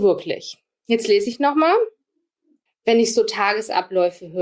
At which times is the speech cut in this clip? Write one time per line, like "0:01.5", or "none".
0:02.7

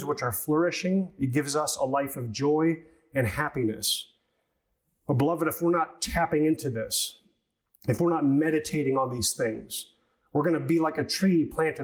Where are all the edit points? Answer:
none

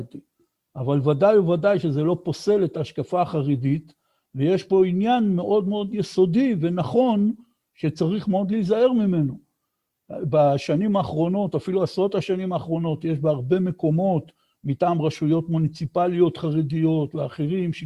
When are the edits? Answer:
none

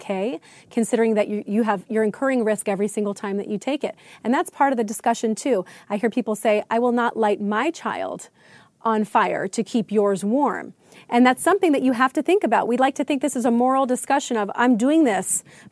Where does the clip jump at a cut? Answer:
none

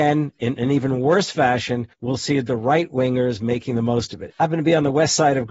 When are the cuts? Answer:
0:01.9
0:04.3

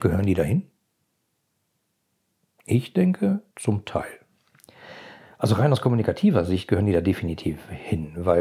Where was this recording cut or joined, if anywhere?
0:03.5

